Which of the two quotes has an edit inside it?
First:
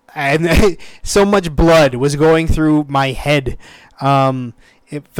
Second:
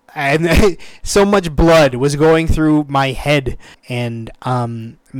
second; 1 cut; at 3.7 s

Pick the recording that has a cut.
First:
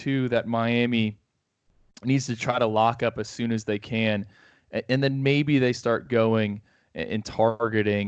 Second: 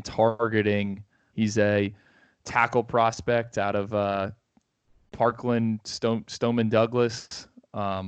second; 1 cut; at 1.3 s

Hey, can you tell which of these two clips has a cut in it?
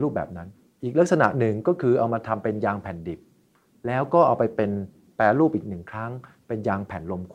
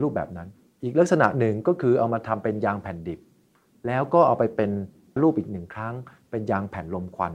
second; 1 cut; at 5.2 s

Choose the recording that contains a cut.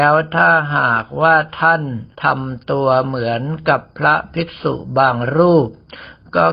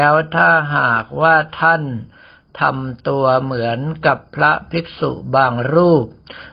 first; 1 cut; at 2.1 s

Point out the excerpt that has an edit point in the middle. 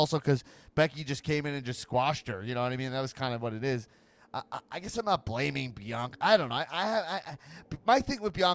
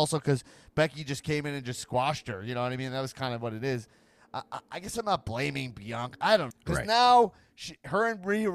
second; 1 cut; at 6.5 s

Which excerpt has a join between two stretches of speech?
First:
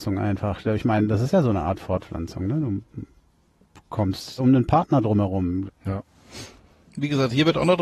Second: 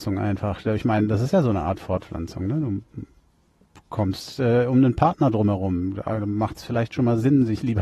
first; 2 cuts; at 4.4 s, 5.7 s

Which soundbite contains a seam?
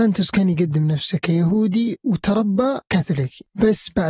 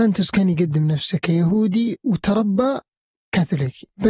first; 1 cut; at 2.8 s

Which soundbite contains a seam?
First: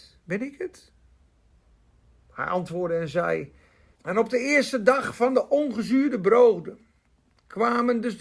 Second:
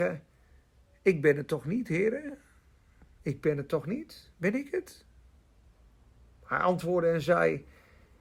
first; 1 cut; at 4.0 s

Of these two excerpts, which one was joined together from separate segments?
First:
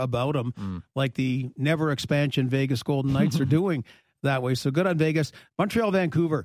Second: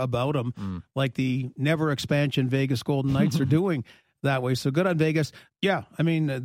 second; 1 cut; at 5.5 s

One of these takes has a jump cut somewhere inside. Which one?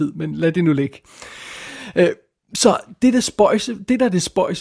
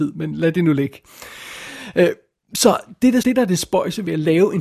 second; 1 cut; at 3.2 s

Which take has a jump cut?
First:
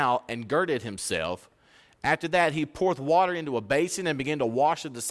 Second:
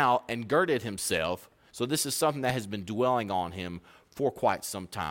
second; 1 cut; at 1.7 s

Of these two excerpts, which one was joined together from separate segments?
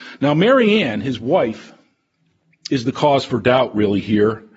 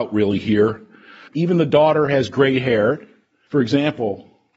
second; 2 cuts; at 1.3 s, 3.5 s

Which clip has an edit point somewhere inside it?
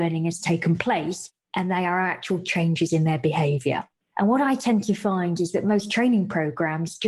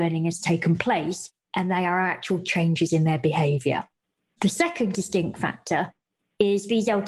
first; 1 cut; at 4.0 s

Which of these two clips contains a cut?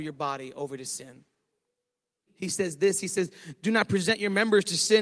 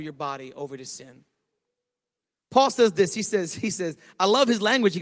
first; 1 cut; at 2.3 s

